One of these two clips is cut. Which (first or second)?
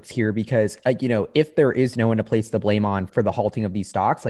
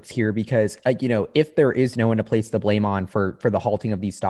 first